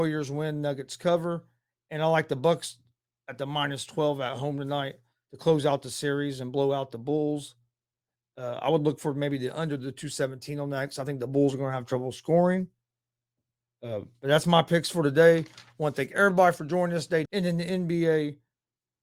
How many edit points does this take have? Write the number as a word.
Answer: one